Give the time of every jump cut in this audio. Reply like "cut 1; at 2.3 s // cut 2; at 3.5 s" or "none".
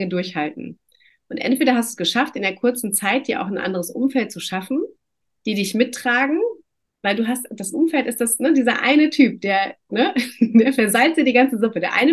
cut 1; at 9.9 s